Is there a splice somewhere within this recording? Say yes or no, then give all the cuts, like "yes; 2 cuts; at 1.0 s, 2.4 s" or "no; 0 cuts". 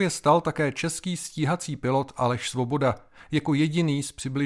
no; 0 cuts